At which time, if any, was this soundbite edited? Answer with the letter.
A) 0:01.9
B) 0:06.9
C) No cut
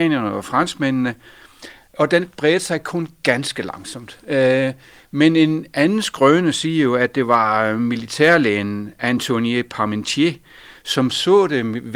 C